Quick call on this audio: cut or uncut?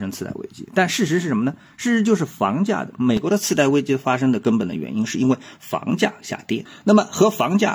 uncut